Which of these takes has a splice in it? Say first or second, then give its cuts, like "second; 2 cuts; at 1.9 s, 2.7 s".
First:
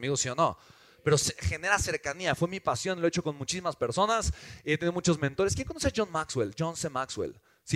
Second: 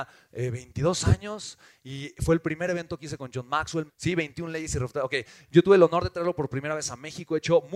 second; 1 cut; at 3.9 s